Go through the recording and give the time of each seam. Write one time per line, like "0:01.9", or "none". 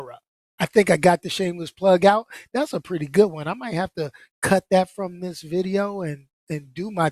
none